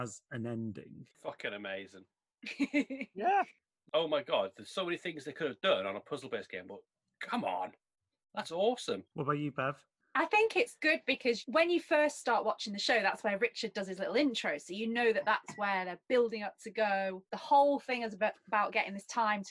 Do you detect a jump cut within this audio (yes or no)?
no